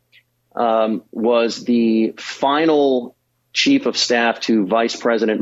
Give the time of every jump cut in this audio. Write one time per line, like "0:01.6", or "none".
0:03.5